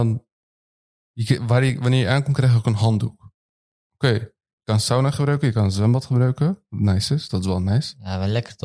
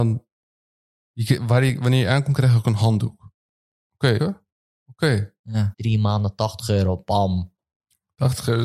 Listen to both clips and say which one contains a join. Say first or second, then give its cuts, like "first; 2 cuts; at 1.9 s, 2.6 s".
second; 2 cuts; at 4.2 s, 5.7 s